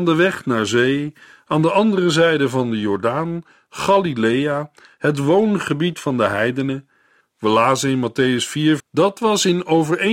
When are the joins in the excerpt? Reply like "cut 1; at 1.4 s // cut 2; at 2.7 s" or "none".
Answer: cut 1; at 7.2 s // cut 2; at 8.8 s